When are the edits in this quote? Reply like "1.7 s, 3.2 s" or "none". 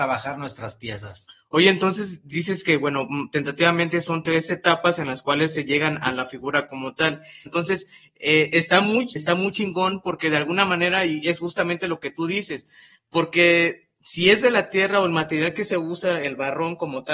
7.5 s, 9.2 s